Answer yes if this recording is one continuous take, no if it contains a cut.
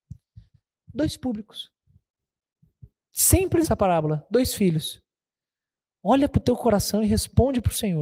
no